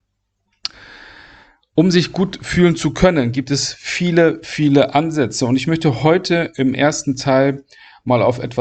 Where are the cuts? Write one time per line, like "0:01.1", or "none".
none